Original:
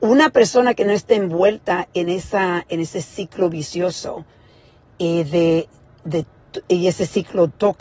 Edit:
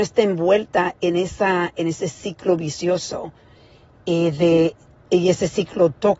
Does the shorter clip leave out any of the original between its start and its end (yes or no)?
yes